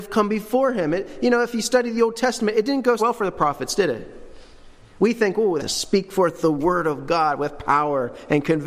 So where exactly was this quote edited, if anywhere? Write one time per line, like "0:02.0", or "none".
0:03.0
0:05.6